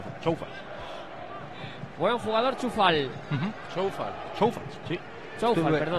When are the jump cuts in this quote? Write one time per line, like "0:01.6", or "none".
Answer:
none